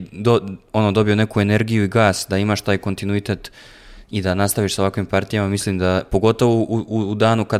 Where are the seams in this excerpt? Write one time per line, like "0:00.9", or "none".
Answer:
none